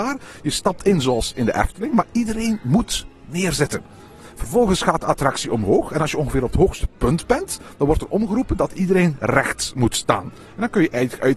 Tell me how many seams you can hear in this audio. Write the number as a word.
zero